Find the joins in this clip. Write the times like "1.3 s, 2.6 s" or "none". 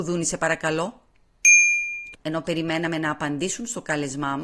2.1 s